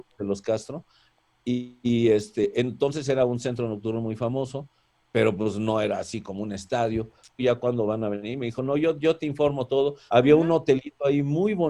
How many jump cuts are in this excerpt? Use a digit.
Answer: 2